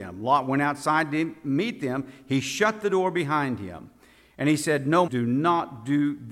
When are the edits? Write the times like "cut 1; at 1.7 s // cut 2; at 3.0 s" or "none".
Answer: cut 1; at 5.1 s